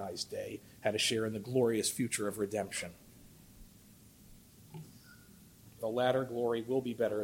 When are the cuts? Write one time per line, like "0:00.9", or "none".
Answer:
0:05.8